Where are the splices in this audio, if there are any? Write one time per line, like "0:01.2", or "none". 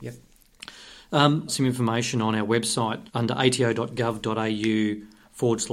0:01.5
0:03.1